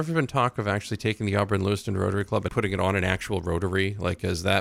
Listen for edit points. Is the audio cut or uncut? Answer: cut